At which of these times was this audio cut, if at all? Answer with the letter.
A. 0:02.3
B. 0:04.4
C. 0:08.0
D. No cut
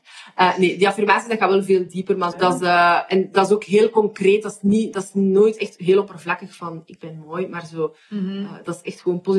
A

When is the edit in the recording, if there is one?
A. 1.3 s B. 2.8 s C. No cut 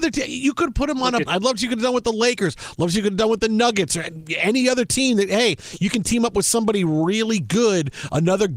A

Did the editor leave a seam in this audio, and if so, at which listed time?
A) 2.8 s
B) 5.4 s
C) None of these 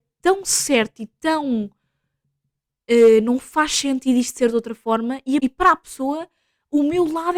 B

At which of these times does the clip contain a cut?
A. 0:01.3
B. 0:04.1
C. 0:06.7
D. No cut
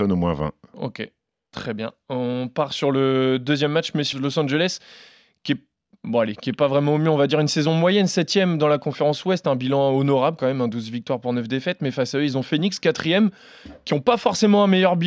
B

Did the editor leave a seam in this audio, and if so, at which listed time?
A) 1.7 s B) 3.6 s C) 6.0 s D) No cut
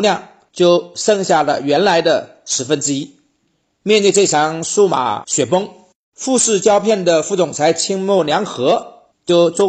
D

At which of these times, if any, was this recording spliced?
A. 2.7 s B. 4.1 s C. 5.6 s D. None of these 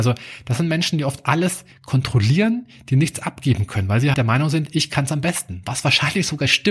B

